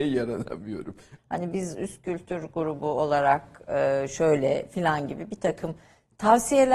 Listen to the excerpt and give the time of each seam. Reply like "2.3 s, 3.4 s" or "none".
1.2 s

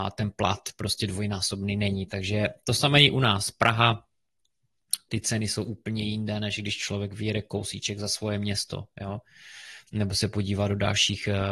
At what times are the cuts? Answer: 5.1 s

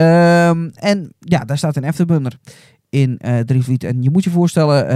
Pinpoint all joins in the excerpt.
none

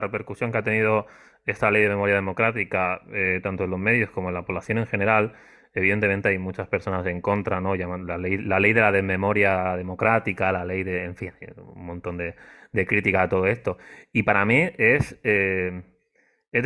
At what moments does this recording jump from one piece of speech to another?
none

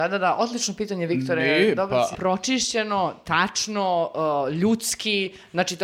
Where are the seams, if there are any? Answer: 2.1 s

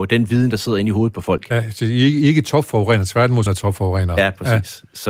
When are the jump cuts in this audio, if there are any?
3.5 s

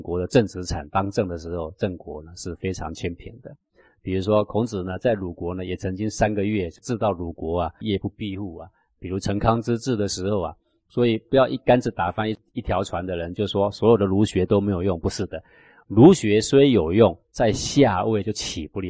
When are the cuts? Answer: 7.8 s

